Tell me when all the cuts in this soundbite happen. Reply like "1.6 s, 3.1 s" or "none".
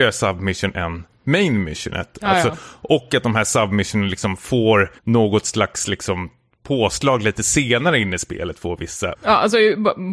5.0 s, 9.1 s